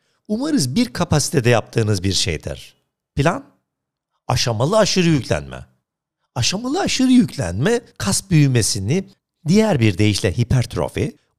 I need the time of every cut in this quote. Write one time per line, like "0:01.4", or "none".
none